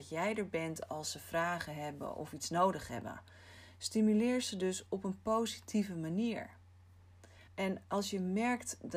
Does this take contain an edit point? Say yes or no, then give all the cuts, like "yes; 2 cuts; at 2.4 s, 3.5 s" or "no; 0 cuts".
yes; 1 cut; at 7.5 s